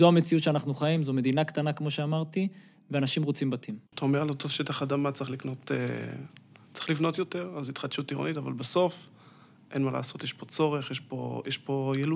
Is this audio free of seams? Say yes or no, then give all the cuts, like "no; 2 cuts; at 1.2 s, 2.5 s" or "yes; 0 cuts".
no; 1 cut; at 3.9 s